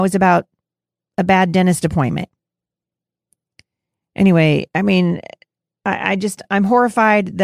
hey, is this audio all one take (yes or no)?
yes